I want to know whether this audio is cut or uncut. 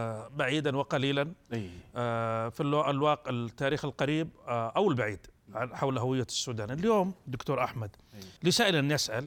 cut